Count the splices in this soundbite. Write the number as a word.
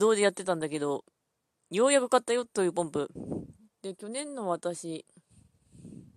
one